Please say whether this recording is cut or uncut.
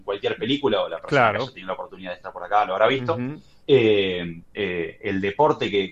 cut